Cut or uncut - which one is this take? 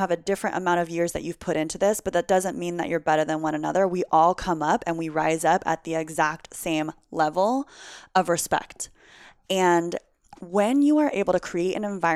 uncut